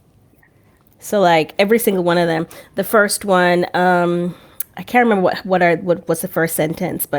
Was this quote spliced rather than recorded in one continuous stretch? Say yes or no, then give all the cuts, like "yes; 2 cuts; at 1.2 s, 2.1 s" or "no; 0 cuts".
no; 0 cuts